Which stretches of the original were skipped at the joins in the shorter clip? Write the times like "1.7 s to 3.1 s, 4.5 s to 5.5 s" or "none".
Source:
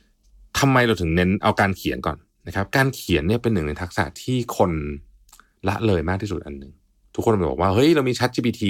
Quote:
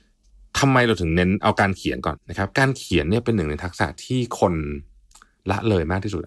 2.2 s to 2.3 s